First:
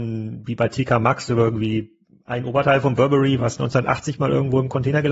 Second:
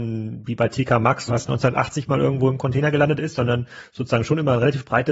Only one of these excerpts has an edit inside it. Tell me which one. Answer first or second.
second